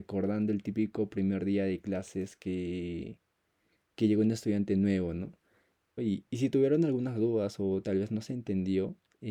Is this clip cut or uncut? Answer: cut